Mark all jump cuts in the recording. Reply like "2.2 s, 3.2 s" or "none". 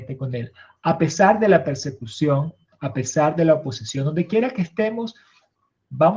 none